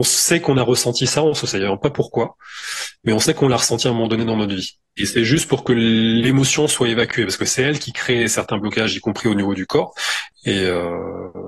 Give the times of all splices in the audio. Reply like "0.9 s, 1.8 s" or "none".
5.0 s, 10.3 s